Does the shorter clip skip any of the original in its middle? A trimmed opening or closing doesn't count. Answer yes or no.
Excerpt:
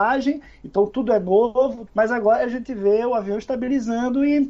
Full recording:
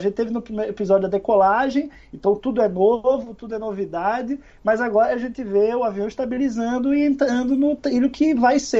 yes